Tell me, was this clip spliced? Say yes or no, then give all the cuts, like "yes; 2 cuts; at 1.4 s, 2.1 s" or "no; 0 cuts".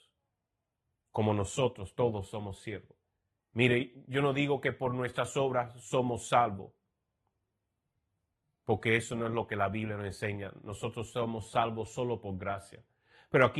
yes; 1 cut; at 3.4 s